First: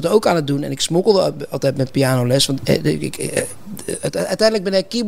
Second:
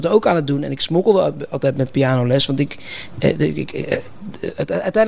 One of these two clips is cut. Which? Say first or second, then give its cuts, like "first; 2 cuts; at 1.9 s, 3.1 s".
first; 1 cut; at 2.6 s